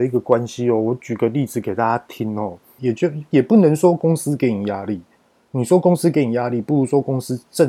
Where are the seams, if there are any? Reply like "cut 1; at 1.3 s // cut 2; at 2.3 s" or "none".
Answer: cut 1; at 2.8 s